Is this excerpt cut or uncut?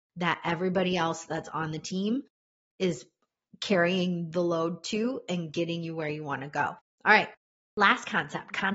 cut